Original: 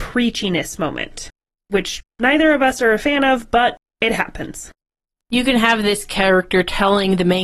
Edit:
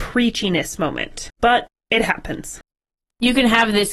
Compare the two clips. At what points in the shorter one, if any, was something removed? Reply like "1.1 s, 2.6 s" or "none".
1.4 s

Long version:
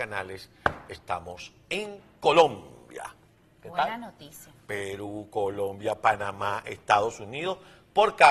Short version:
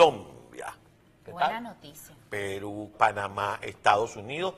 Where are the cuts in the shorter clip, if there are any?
2.9 s

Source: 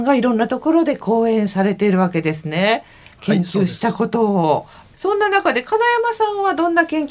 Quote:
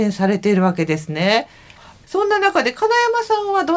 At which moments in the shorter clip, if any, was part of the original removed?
1.8 s

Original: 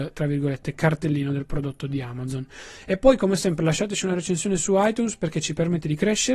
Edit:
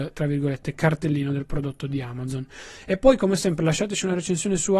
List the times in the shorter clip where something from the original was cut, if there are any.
none

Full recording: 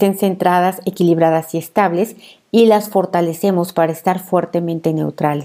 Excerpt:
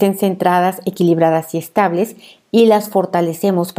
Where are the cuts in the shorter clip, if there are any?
none

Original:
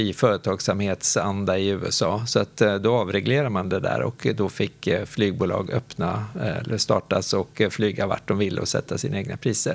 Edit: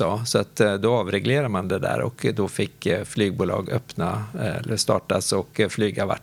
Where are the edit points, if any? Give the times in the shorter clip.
none

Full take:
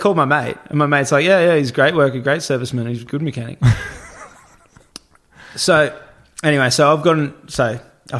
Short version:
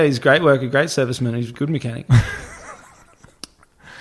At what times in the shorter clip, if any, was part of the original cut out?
none

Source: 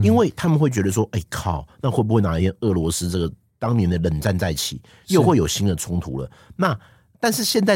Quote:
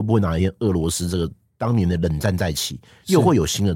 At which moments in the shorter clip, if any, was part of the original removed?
none

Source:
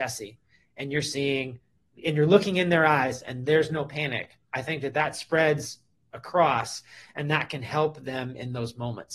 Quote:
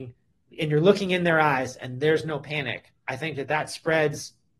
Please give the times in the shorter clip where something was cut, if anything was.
none

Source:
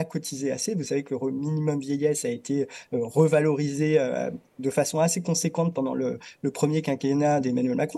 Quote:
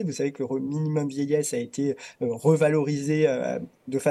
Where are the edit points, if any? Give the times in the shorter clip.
none

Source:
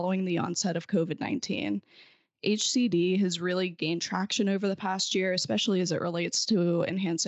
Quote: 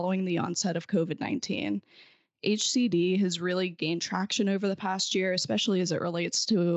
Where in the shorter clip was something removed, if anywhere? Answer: none

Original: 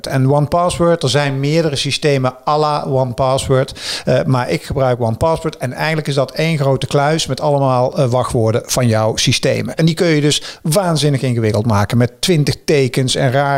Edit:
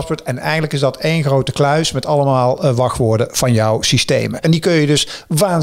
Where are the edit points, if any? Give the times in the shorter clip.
none

